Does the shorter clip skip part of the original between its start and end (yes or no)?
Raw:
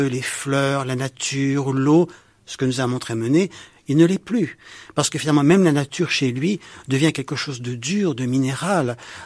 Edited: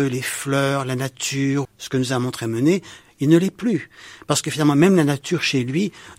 yes